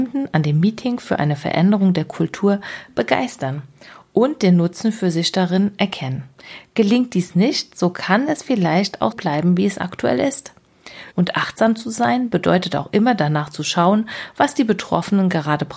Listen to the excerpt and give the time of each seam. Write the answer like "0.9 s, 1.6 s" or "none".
9.1 s, 11.1 s